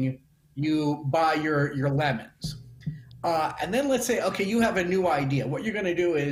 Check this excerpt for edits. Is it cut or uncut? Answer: uncut